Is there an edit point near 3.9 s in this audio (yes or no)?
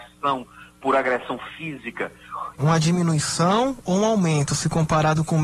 no